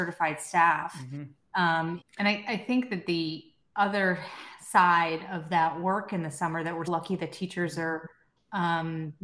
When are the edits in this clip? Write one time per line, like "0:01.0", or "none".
0:02.0
0:06.9